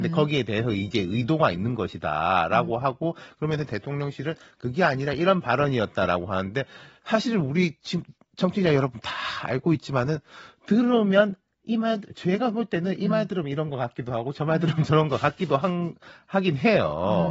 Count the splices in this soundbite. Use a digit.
0